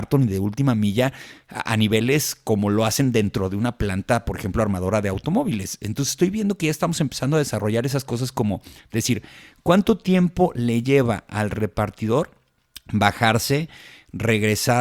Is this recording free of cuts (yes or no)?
yes